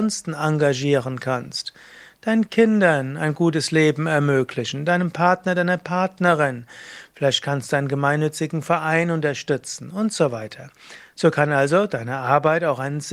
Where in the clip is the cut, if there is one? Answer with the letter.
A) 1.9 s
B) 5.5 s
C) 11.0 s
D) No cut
D